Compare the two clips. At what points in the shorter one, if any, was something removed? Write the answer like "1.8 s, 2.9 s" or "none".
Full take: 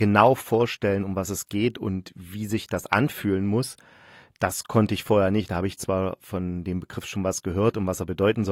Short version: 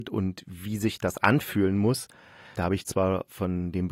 2.5 s

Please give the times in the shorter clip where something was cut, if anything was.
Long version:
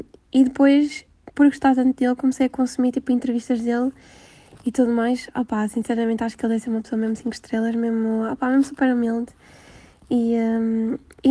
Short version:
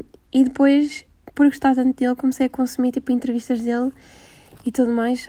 none

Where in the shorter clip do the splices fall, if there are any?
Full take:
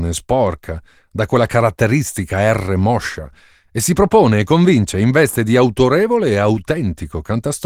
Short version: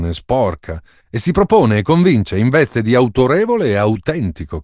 1.0 s

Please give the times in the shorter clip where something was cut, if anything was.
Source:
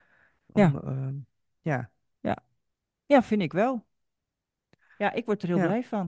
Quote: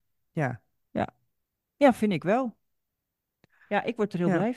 none

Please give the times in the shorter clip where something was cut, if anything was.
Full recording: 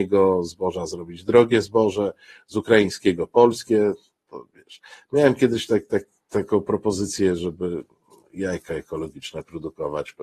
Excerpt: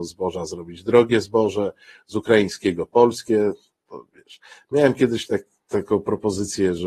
5.3 s

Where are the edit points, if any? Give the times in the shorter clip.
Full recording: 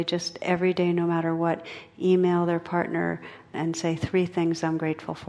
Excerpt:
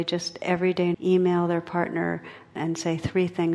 0.9 s

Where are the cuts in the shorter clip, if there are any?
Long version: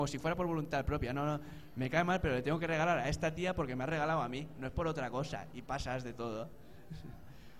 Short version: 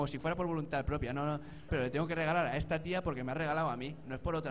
1.7 s

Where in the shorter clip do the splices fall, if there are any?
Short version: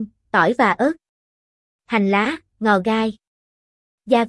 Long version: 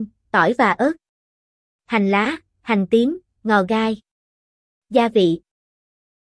2.5 s

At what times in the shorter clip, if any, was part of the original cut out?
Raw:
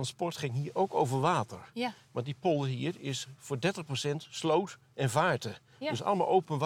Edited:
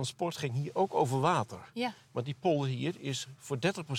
none

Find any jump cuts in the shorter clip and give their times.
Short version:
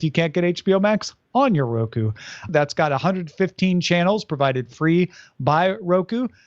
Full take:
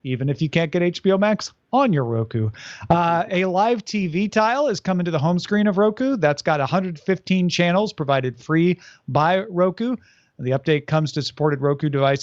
2.5 s

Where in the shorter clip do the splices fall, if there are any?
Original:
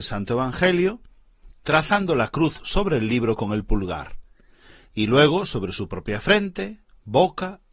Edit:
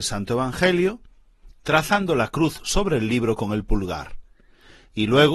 none

